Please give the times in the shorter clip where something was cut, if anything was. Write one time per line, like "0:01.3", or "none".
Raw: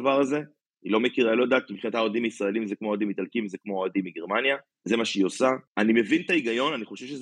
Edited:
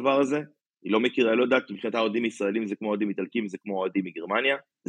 none